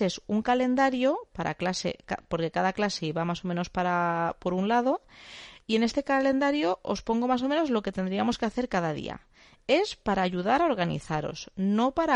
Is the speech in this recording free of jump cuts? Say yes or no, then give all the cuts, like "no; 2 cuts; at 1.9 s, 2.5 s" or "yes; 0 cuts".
yes; 0 cuts